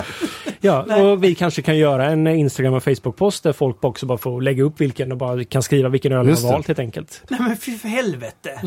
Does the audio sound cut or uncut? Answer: cut